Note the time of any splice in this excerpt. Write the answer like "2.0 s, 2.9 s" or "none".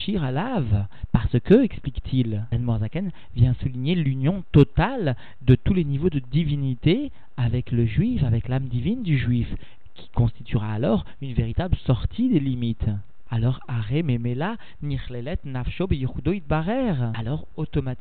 13.2 s